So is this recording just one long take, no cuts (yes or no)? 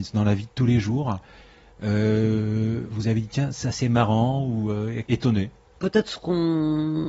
yes